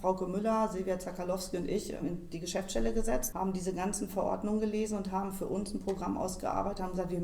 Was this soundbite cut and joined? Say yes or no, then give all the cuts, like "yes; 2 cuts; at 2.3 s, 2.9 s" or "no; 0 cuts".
yes; 2 cuts; at 2.0 s, 3.3 s